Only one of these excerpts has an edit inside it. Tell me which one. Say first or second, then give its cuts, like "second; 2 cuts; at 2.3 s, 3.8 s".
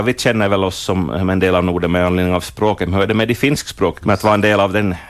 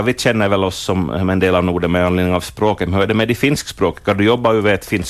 first; 1 cut; at 4.0 s